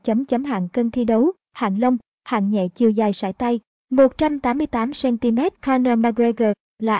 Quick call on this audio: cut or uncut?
cut